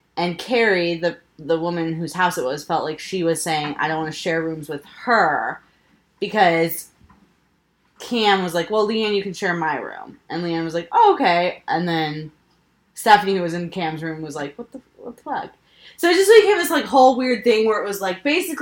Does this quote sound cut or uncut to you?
uncut